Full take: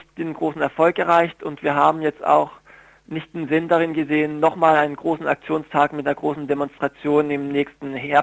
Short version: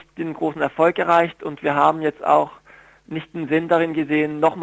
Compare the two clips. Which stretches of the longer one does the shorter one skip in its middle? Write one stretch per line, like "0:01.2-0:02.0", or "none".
none